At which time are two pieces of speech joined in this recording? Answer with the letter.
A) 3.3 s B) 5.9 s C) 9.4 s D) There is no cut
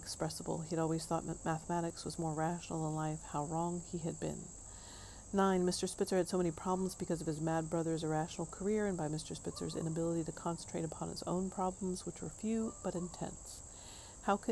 D